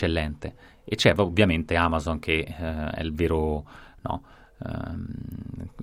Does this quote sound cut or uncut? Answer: uncut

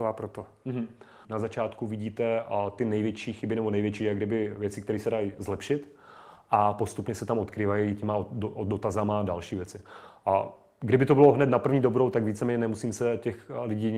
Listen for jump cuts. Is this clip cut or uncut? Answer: cut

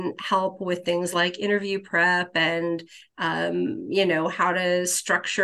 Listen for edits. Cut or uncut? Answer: uncut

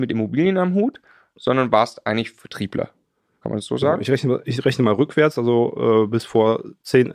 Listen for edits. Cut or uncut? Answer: uncut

